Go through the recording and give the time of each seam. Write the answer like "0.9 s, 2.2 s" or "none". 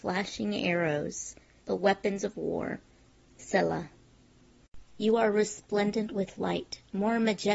1.6 s